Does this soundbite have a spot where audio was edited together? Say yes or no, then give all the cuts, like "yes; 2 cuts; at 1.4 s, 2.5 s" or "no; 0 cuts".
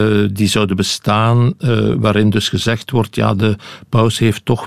no; 0 cuts